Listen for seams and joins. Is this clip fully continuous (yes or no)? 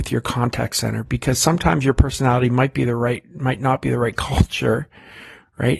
yes